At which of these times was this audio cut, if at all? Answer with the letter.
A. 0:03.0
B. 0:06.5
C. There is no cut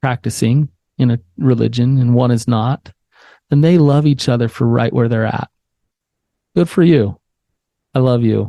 C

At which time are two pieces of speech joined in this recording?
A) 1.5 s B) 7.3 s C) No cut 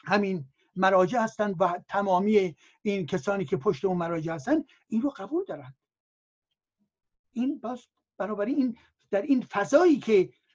A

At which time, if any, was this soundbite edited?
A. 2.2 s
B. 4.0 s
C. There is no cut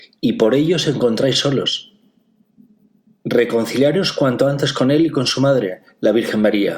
C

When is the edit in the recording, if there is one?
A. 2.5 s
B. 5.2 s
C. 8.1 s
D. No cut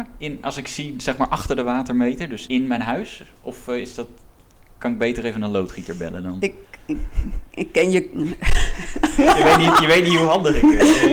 A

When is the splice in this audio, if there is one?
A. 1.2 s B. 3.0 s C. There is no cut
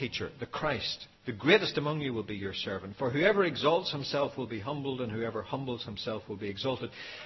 A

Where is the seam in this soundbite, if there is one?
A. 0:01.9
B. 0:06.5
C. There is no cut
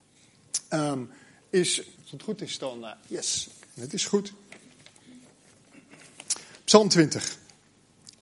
A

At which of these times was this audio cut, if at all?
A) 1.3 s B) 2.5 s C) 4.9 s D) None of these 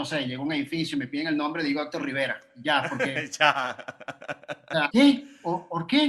C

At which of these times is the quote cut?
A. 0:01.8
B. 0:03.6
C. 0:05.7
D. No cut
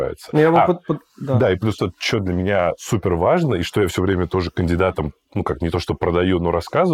A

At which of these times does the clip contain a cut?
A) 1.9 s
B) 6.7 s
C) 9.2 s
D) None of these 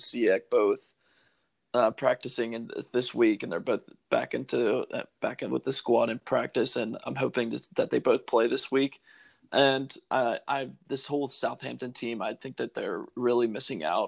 D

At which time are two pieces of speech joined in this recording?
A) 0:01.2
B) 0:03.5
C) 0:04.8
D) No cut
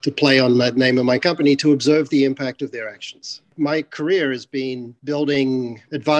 D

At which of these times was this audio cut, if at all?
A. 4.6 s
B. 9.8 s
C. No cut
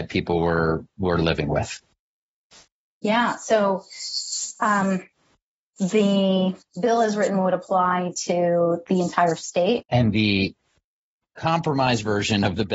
B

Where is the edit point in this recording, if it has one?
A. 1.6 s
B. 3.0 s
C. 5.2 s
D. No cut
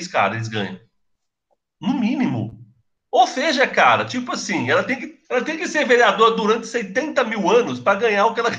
C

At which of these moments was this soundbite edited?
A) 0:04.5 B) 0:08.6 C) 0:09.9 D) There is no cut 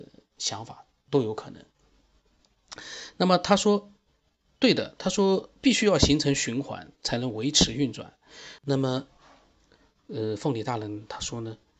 B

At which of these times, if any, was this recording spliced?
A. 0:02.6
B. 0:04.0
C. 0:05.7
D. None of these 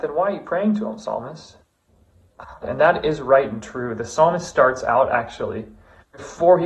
A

